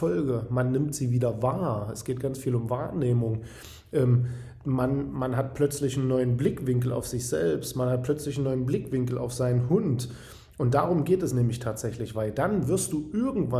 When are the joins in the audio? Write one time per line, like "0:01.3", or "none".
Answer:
none